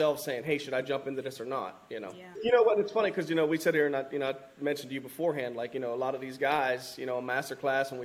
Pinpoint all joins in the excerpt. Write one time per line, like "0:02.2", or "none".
0:02.3